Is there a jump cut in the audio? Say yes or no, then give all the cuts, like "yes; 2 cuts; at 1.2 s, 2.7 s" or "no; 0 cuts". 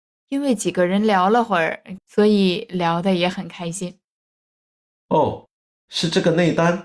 yes; 1 cut; at 2.0 s